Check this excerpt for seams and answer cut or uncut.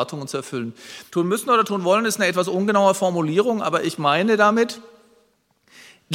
cut